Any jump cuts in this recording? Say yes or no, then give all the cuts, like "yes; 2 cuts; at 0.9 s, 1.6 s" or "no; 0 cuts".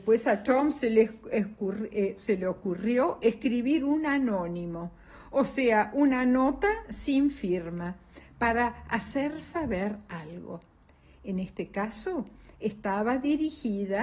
no; 0 cuts